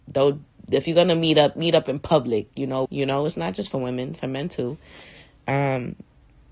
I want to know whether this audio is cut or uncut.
cut